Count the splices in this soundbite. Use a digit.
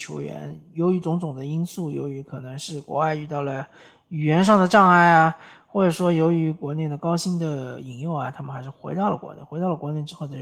0